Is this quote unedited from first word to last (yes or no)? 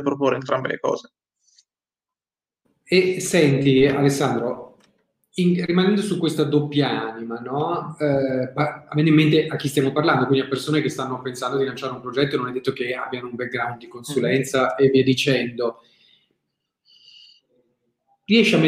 yes